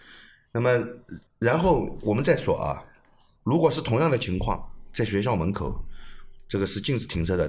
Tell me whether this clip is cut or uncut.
cut